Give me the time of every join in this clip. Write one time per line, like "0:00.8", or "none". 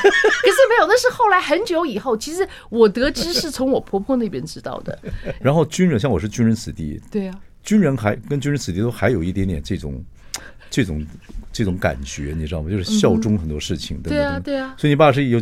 0:05.4